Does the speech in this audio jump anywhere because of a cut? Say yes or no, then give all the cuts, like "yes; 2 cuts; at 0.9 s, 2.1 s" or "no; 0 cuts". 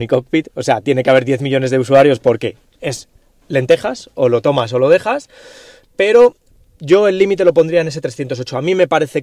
no; 0 cuts